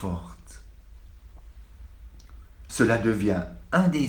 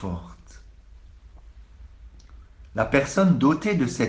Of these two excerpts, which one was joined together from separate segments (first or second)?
first